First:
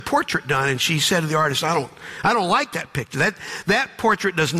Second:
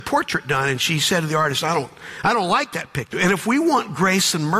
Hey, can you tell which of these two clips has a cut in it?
second; 1 cut; at 3.1 s

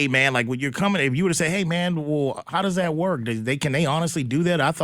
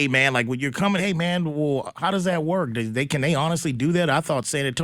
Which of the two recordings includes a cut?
second; 1 cut; at 1.0 s

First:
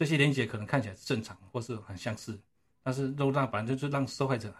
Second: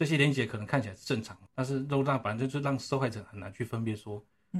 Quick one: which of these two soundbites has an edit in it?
second; 1 cut; at 1.5 s

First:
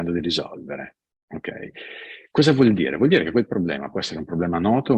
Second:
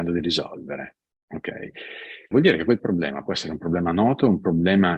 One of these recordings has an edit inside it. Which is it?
second; 1 cut; at 2.3 s

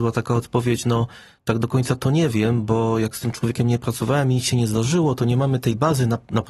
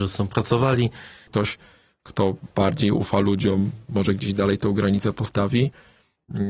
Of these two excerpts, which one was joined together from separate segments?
second; 1 cut; at 1.3 s

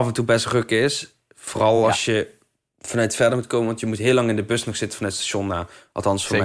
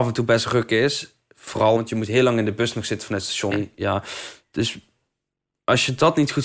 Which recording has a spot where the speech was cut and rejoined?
second; 2 cuts; at 1.8 s, 3.5 s

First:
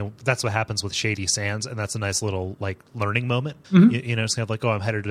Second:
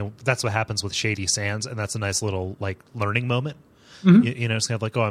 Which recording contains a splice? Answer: first; 1 cut; at 3.6 s

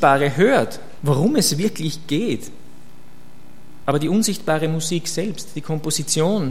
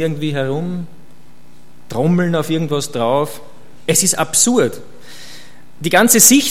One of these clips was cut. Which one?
first; 2 cuts; at 1.0 s, 3.8 s

